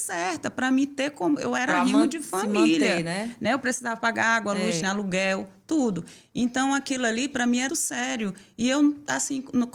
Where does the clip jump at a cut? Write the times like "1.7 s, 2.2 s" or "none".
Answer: 4.8 s, 7.7 s